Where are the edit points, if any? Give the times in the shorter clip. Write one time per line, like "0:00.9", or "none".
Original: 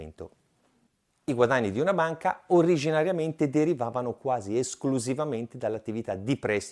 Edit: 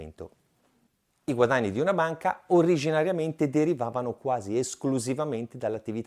none